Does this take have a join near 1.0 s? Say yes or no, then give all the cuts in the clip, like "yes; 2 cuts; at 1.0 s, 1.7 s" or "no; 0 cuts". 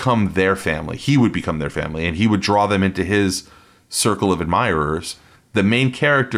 no; 1 cut; at 5.4 s